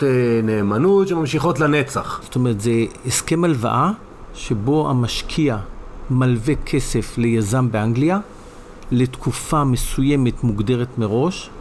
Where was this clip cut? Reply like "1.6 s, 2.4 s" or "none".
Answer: 2.2 s